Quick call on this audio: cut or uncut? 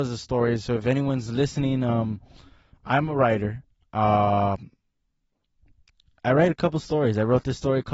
uncut